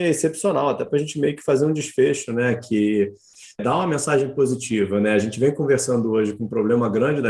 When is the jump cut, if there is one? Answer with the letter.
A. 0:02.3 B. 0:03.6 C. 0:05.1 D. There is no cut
B